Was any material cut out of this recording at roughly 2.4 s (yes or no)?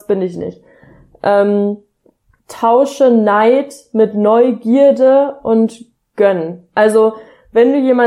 yes